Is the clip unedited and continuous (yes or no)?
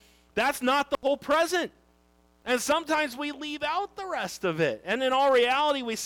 yes